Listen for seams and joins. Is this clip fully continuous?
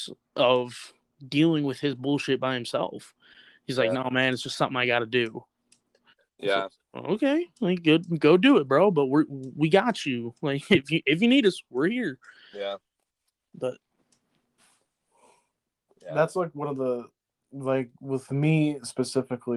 yes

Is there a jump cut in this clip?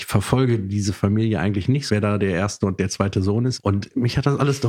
yes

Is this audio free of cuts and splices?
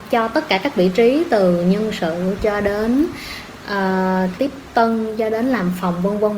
no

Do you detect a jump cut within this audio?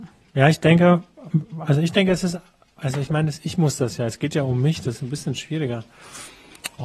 no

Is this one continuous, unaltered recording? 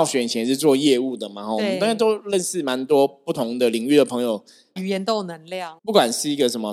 no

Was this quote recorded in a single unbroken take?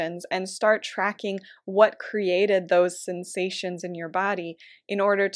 yes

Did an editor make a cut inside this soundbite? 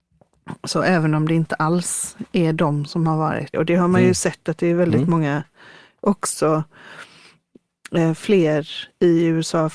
yes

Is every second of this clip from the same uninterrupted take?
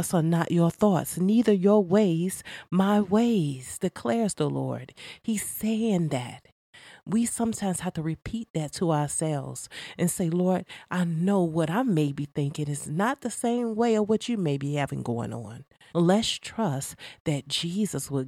no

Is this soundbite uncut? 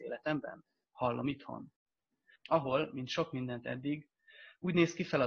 no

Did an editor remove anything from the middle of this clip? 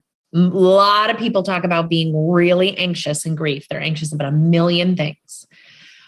no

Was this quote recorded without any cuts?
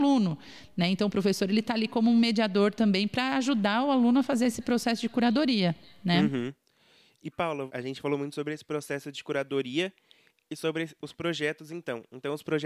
yes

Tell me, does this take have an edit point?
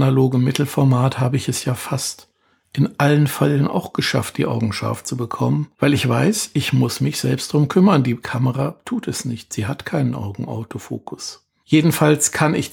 no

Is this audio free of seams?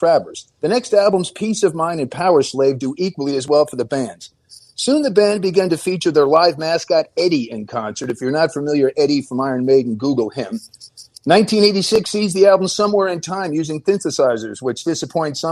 yes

